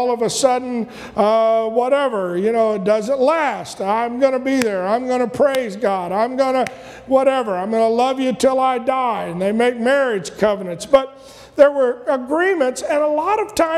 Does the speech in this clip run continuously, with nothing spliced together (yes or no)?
yes